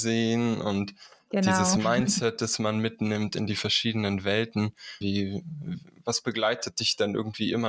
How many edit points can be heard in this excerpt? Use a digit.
1